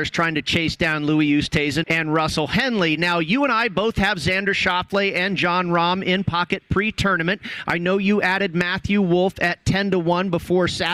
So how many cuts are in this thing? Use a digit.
1